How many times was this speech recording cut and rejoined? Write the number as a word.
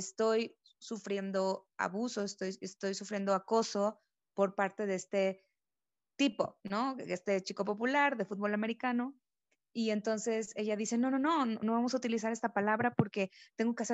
zero